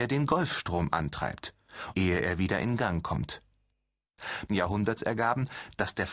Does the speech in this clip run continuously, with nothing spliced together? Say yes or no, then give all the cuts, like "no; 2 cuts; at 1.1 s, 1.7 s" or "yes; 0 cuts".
no; 2 cuts; at 1.9 s, 4.5 s